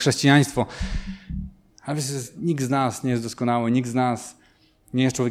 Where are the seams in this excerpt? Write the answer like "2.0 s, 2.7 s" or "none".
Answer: 1.7 s